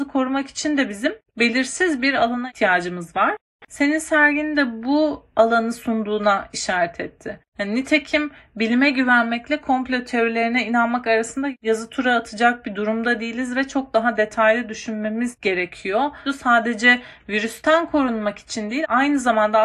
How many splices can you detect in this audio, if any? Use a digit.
1